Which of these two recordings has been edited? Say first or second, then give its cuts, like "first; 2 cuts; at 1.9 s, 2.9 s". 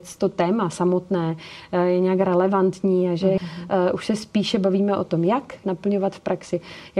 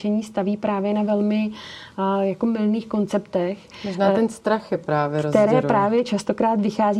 first; 2 cuts; at 3.4 s, 5.6 s